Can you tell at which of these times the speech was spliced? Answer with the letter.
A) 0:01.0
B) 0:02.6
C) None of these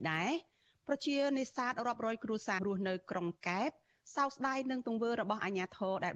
B